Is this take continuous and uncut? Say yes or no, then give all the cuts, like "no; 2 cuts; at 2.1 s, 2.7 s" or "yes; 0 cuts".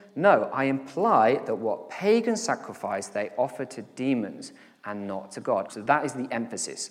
no; 1 cut; at 5.7 s